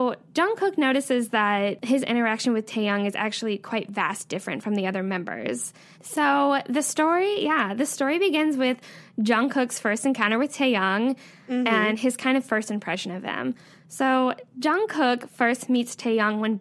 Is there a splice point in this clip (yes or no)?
yes